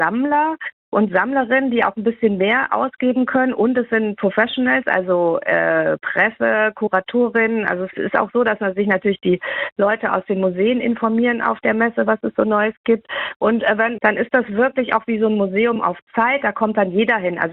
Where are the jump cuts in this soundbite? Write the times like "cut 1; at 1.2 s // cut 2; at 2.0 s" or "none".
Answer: cut 1; at 7.9 s // cut 2; at 14.0 s